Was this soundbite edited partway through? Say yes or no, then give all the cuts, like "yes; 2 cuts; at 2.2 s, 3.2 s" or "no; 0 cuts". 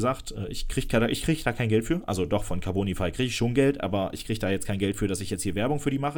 no; 0 cuts